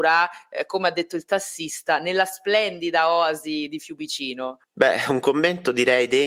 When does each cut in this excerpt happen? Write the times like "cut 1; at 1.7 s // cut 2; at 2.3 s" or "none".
cut 1; at 4.6 s